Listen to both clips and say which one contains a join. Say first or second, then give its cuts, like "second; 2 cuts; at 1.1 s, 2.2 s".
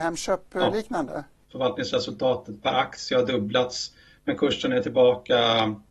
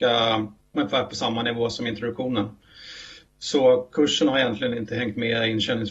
first; 1 cut; at 1.4 s